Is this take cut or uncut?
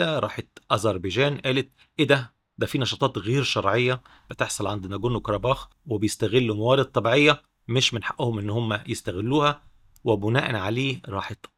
uncut